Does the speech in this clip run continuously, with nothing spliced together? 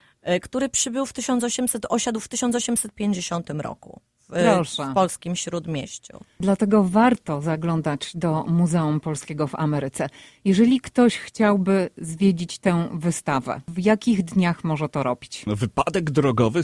no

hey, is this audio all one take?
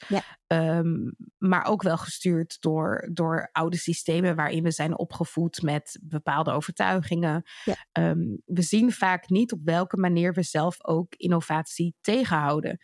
yes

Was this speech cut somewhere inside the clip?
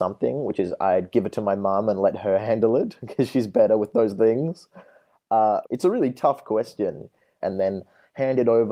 yes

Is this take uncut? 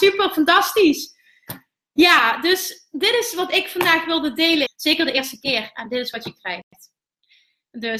no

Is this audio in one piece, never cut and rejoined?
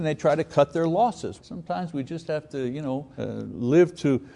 no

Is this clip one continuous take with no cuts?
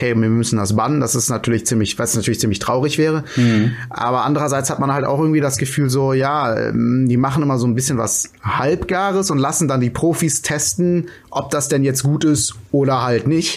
yes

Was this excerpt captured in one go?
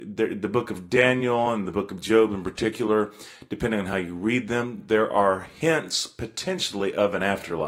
yes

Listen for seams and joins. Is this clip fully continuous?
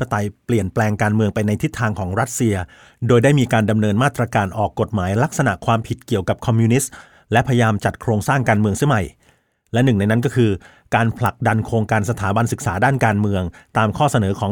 yes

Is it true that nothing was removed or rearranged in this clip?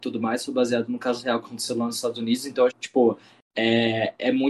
no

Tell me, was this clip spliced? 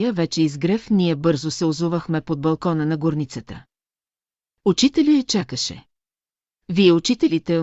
yes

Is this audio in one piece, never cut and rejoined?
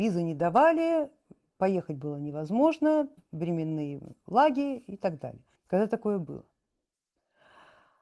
no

